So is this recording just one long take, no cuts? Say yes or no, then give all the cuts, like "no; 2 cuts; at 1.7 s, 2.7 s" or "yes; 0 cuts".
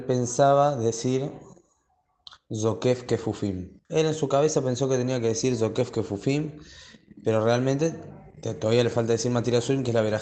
no; 1 cut; at 3.8 s